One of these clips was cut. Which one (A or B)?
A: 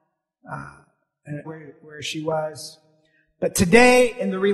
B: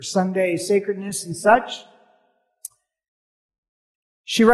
A